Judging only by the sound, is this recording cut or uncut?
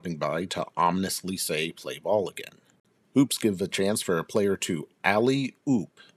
cut